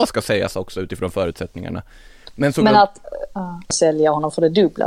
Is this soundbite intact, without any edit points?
no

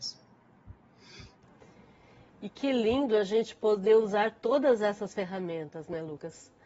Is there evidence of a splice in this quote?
no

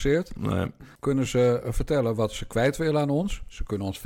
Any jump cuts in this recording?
yes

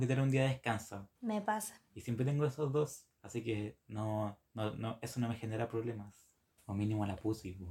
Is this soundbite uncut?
no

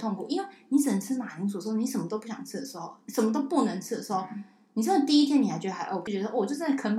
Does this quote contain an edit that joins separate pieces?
yes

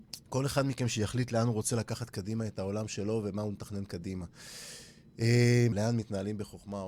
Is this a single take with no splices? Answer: no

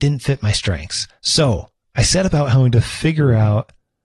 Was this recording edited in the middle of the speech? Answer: no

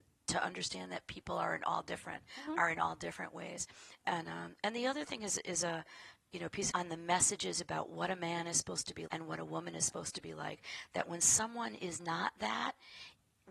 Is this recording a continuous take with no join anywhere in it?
no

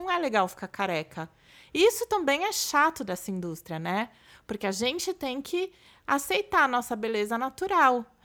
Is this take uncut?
yes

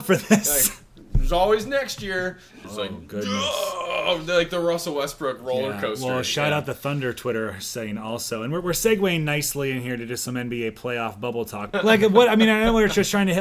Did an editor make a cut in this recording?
yes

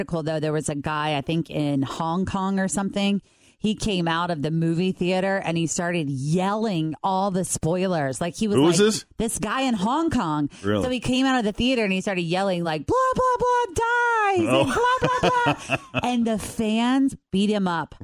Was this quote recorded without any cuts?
yes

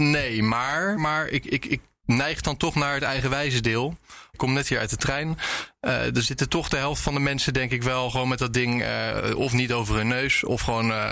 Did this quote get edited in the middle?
yes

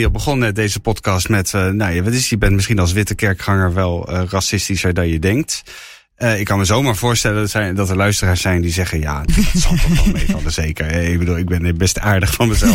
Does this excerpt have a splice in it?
yes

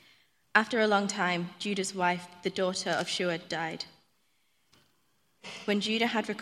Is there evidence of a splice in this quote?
no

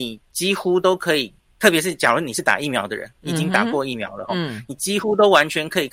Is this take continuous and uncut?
yes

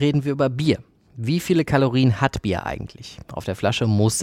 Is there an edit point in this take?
no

